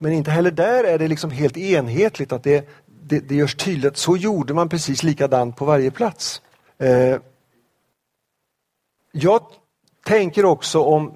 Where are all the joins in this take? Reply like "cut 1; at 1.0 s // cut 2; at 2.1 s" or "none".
cut 1; at 6.7 s